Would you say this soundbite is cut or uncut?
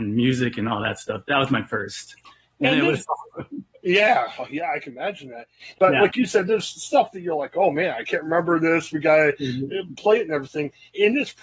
cut